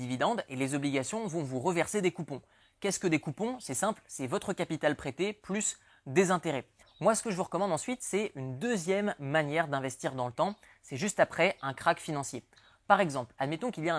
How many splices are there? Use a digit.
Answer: 1